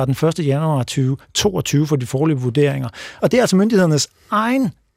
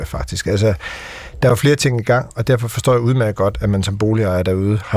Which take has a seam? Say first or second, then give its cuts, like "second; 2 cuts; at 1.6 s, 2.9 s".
first; 1 cut; at 3.2 s